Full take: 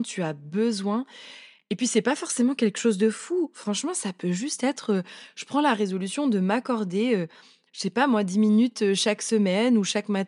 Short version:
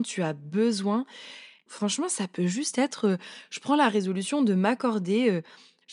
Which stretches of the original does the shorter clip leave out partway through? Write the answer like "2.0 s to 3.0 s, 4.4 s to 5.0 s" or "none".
1.7 s to 3.5 s